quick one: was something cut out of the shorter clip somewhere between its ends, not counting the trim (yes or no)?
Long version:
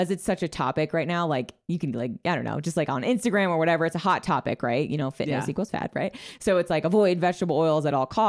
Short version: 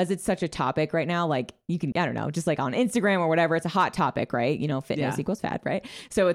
yes